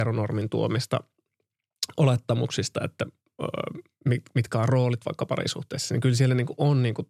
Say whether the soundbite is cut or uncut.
uncut